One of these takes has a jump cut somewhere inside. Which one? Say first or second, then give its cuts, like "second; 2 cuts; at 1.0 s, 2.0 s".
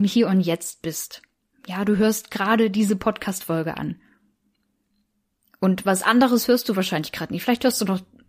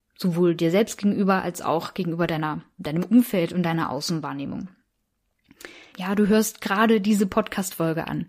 second; 2 cuts; at 2.8 s, 5.9 s